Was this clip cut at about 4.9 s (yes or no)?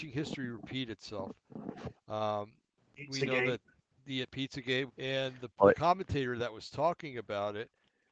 yes